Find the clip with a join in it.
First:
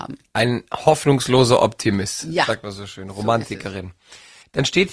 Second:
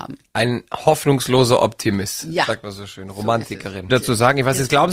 second; 1 cut; at 3.9 s

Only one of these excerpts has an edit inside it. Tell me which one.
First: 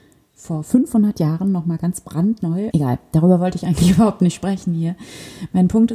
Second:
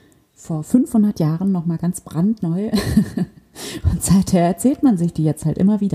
first; 1 cut; at 2.7 s

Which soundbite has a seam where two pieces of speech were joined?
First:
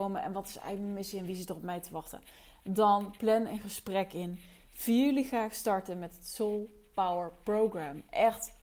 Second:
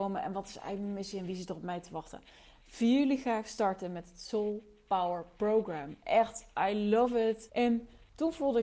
second; 2 cuts; at 2.6 s, 7.5 s

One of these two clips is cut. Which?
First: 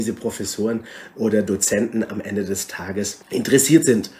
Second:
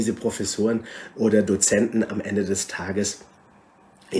first; 1 cut; at 3.2 s

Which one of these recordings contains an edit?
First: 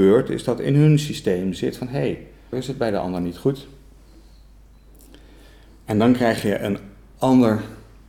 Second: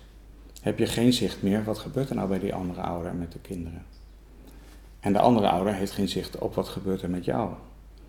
first; 1 cut; at 2.5 s

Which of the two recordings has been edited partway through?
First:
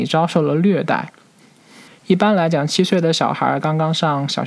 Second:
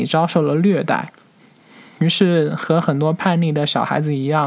first; 1 cut; at 1.9 s

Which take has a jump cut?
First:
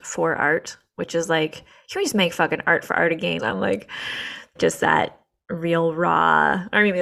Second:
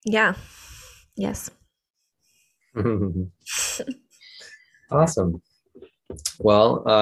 first; 2 cuts; at 3.4 s, 4.6 s

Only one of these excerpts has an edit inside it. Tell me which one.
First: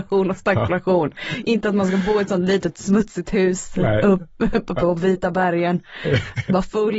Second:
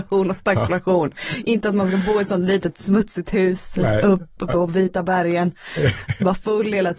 second; 1 cut; at 4.4 s

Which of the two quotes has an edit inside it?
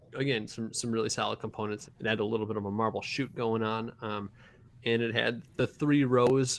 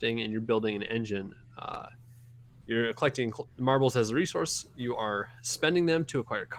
first; 1 cut; at 1.9 s

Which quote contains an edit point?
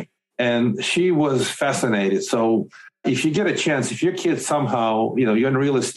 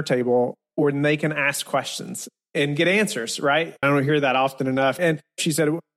second; 2 cuts; at 3.8 s, 5.0 s

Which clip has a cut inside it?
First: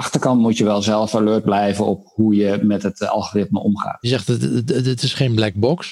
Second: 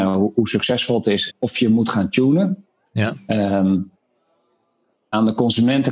second; 1 cut; at 1.3 s

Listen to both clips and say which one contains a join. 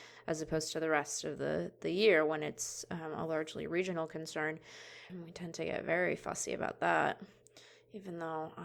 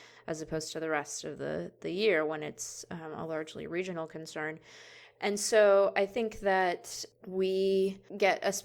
first; 1 cut; at 5.1 s

